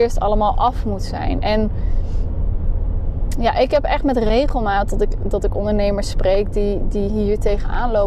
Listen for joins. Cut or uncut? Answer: uncut